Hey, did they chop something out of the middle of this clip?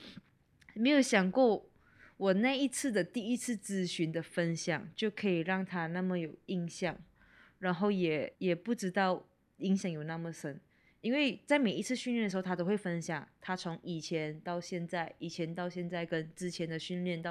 yes; 1 cut; at 8.3 s

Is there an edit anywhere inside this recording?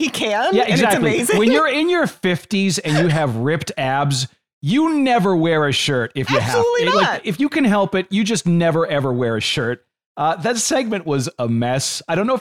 no; 0 cuts

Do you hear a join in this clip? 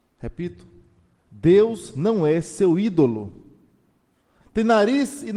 yes; 1 cut; at 4.4 s

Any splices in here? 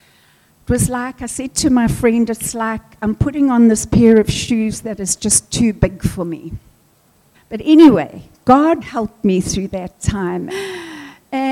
yes; 3 cuts; at 7.3 s, 8.8 s, 10.5 s

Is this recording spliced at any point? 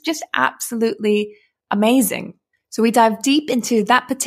no; 0 cuts

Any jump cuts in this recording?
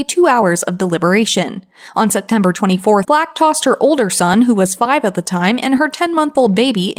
yes; 1 cut; at 3.0 s

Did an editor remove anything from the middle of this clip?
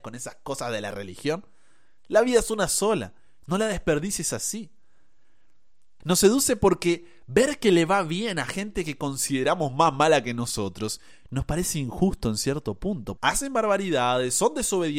yes; 2 cuts; at 6.0 s, 13.2 s

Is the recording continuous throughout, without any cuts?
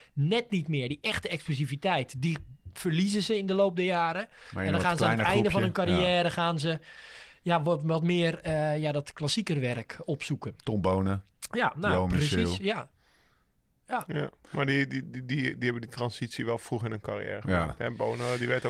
yes; 0 cuts

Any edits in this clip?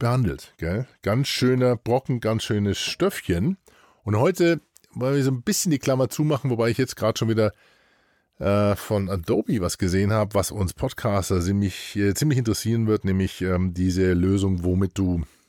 no; 0 cuts

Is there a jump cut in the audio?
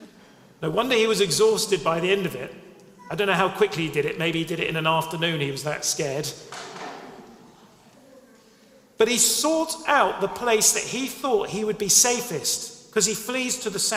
no; 0 cuts

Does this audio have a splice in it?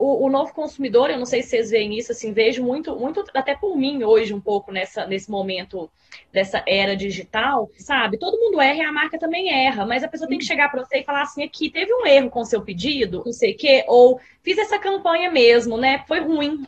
yes; 2 cuts; at 7.8 s, 13.3 s

